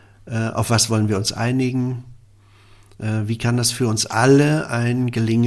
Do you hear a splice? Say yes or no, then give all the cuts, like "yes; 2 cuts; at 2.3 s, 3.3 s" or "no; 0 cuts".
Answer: no; 0 cuts